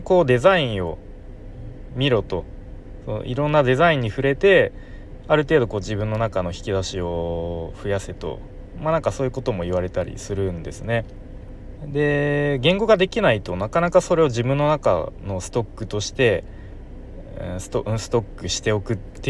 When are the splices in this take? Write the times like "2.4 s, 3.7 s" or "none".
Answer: 11.8 s